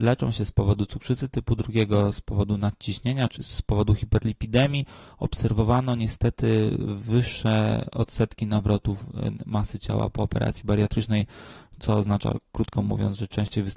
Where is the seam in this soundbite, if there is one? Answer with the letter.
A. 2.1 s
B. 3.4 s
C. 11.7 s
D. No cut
B